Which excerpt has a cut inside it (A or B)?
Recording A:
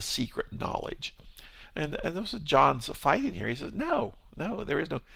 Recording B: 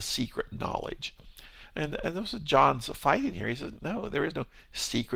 B